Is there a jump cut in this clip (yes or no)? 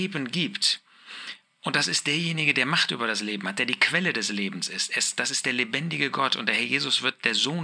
no